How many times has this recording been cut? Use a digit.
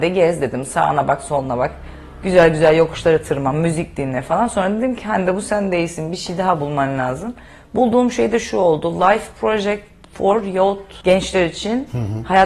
0